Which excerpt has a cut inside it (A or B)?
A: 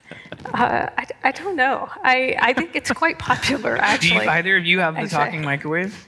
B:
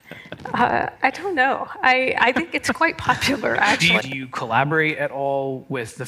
B